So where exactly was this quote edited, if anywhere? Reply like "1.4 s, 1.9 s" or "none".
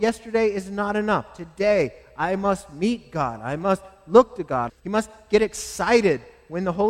4.7 s